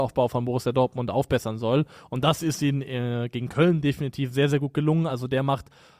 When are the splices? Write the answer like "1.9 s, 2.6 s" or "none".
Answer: none